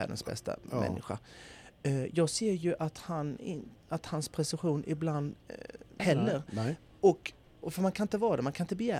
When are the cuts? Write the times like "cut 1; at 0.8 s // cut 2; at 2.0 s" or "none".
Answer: cut 1; at 6.0 s // cut 2; at 7.6 s